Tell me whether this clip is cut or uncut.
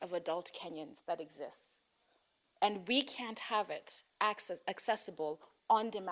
uncut